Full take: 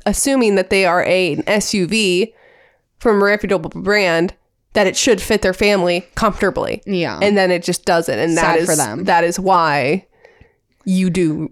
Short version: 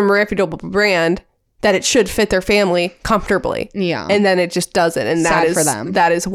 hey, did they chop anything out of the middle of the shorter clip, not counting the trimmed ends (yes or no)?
no